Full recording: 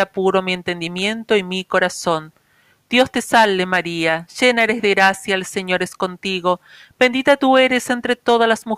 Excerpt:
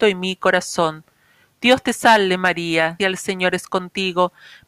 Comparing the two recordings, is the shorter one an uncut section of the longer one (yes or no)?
no